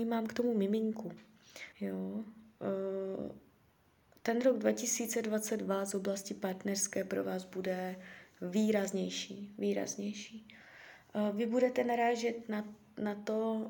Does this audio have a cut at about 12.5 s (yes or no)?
no